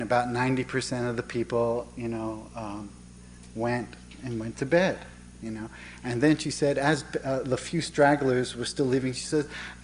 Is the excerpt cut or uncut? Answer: uncut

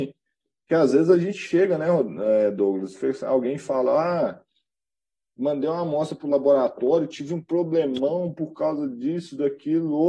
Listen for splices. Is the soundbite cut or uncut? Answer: uncut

